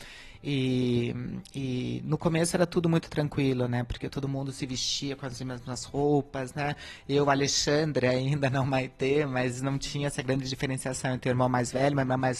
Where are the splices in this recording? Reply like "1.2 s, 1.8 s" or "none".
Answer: none